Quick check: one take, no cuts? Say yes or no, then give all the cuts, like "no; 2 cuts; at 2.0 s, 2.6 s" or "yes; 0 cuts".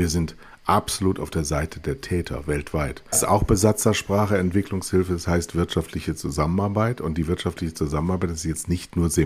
no; 1 cut; at 3.1 s